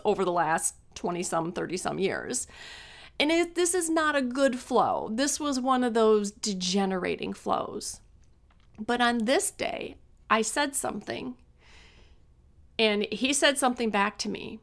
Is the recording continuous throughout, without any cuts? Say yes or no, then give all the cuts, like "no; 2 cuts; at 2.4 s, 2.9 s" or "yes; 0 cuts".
yes; 0 cuts